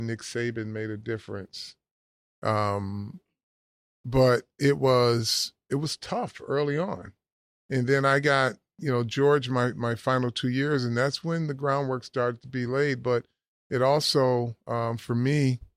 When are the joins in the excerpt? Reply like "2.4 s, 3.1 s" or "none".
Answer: none